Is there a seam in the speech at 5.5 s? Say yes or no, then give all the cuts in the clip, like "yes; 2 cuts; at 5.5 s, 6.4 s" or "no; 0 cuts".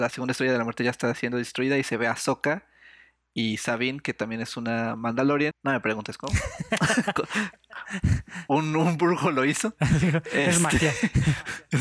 yes; 1 cut; at 5.5 s